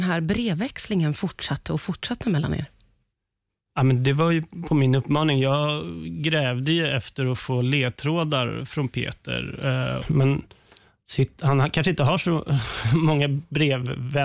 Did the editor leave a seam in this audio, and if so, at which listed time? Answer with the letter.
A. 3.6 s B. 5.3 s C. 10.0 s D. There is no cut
C